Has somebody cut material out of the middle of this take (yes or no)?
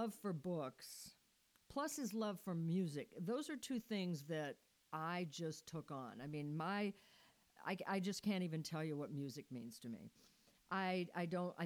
yes